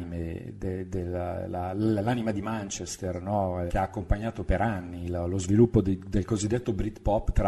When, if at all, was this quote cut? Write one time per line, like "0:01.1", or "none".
0:03.7